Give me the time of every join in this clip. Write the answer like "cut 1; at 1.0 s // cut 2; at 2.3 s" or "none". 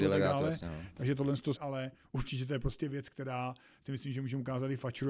cut 1; at 1.6 s